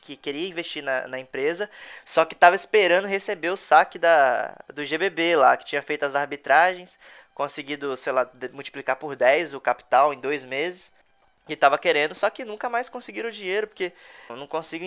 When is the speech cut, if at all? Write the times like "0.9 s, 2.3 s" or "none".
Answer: none